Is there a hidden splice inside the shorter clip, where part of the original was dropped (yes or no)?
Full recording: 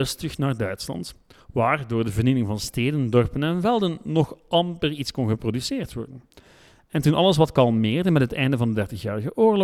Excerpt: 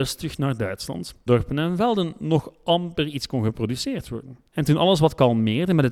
yes